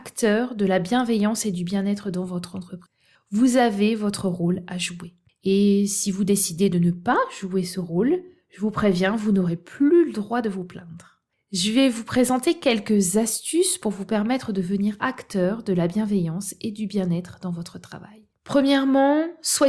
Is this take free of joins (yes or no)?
yes